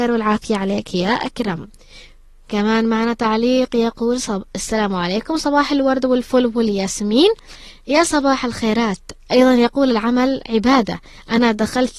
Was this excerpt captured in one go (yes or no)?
yes